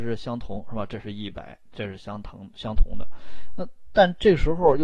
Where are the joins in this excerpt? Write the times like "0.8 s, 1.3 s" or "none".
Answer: none